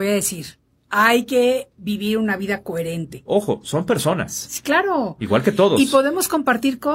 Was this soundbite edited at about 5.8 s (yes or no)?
no